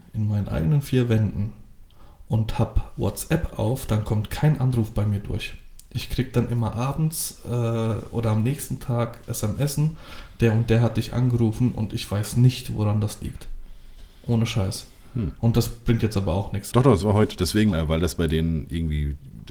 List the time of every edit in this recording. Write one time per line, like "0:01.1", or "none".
0:16.7
0:17.7